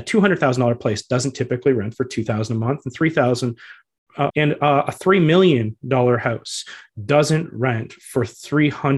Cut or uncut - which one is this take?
cut